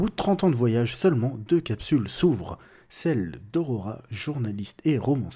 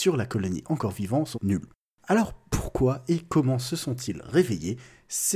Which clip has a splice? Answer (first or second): second